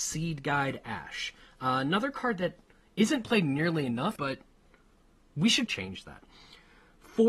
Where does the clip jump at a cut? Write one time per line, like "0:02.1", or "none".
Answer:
0:04.2
0:05.7